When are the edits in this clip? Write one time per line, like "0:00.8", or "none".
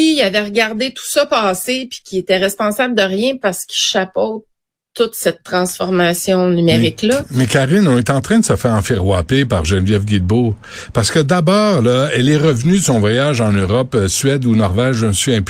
none